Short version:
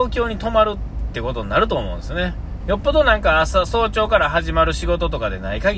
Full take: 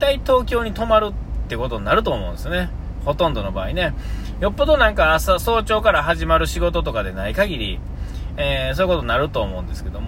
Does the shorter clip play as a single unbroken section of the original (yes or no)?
no